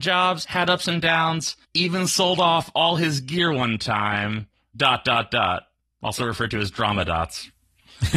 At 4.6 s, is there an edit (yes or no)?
no